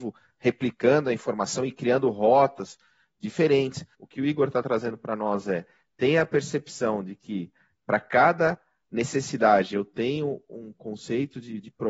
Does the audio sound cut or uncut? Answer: cut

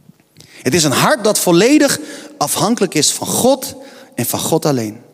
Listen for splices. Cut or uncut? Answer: uncut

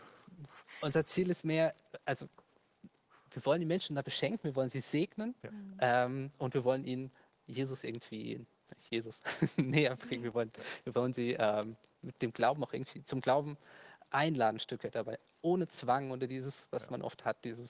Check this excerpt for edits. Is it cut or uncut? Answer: uncut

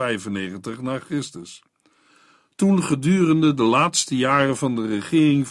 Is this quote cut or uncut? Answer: uncut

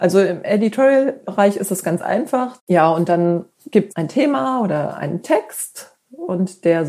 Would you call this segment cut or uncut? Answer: cut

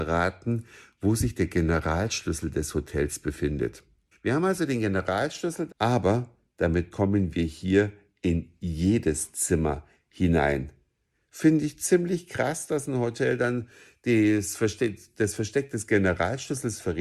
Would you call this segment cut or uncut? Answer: cut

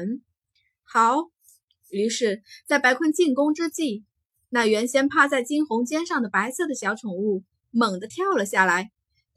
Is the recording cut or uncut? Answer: uncut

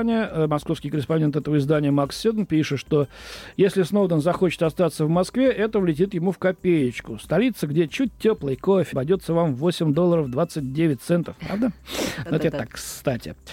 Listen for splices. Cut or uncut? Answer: cut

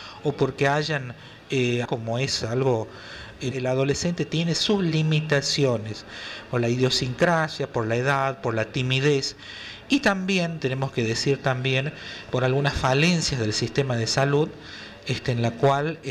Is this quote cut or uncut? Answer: cut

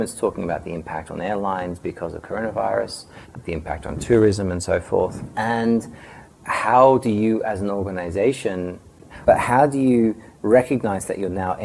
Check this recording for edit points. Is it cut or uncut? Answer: cut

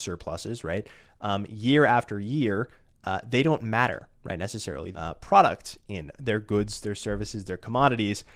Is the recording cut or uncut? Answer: cut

